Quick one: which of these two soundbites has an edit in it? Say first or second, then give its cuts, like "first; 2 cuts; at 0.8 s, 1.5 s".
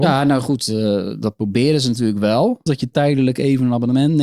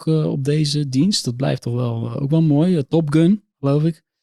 first; 1 cut; at 2.7 s